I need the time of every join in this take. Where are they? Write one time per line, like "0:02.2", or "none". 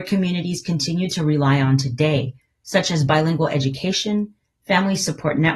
none